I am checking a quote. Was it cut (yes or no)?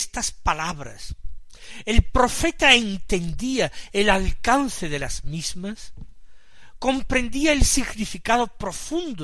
no